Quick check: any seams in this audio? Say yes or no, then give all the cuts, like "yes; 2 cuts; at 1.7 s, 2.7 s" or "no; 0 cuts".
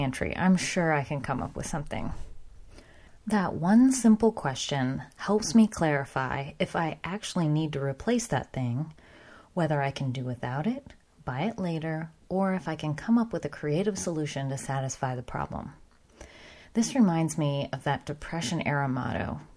no; 0 cuts